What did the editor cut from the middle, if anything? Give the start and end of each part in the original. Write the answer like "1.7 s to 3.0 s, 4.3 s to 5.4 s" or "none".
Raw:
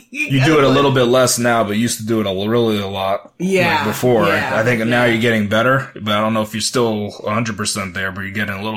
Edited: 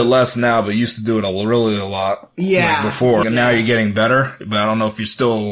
4.3 s to 4.8 s